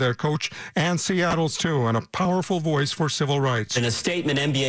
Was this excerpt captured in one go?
yes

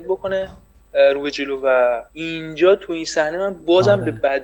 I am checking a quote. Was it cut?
yes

